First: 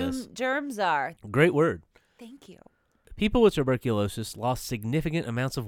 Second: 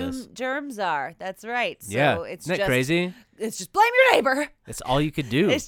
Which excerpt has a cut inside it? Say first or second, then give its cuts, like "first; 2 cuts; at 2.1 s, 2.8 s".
first; 1 cut; at 1.2 s